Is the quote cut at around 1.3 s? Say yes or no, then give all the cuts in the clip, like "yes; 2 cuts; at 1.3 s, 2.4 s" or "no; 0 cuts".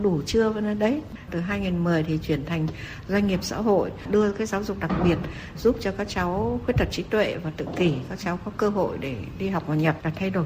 yes; 1 cut; at 1.3 s